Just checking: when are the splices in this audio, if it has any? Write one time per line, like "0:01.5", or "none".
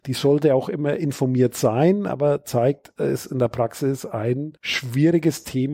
0:04.6